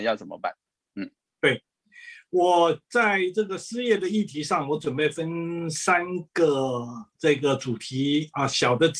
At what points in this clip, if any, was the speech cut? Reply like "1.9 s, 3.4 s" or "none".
2.8 s, 7.1 s

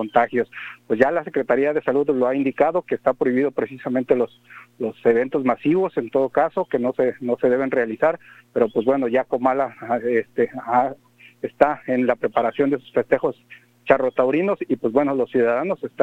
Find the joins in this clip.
none

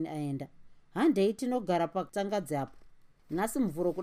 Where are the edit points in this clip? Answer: none

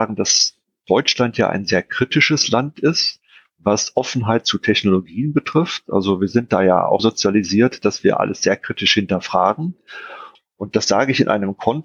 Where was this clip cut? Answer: 7.0 s, 10.4 s

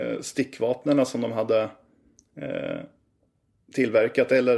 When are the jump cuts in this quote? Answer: none

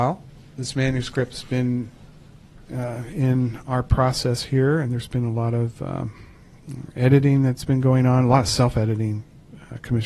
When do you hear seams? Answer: none

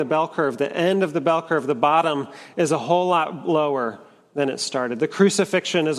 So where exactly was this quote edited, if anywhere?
none

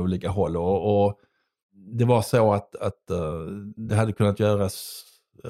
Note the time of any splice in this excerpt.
none

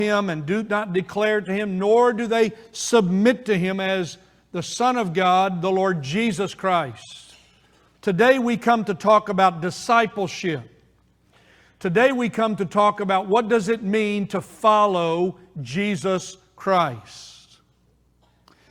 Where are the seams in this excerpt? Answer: 7.9 s

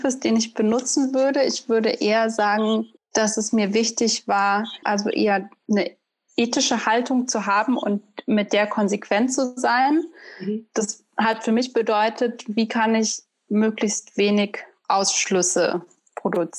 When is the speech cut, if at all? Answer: 4.8 s

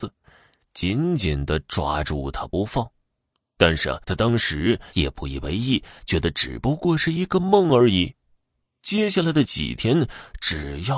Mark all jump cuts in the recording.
4.0 s

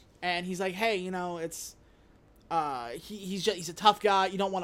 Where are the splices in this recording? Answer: none

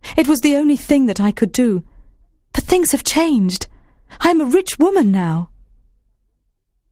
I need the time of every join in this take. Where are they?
none

